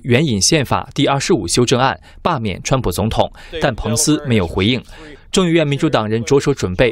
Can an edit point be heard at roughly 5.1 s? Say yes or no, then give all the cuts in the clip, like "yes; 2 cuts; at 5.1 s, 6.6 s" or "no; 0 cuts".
yes; 1 cut; at 5.1 s